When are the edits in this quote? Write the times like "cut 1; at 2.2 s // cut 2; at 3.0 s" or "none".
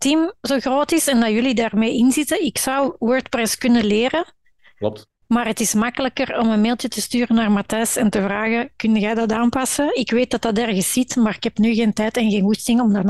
none